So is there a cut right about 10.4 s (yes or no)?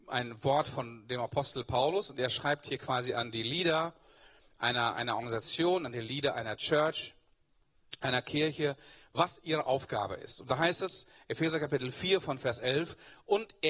no